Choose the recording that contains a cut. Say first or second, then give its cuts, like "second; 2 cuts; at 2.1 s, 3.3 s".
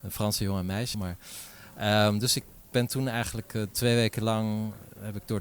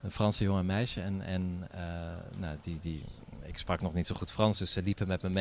first; 1 cut; at 0.9 s